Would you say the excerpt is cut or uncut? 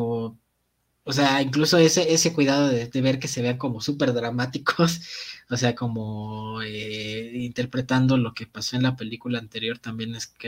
uncut